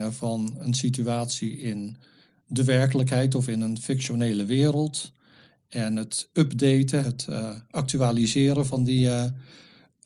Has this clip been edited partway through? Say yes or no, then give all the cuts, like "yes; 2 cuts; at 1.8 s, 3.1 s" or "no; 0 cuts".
yes; 1 cut; at 7.0 s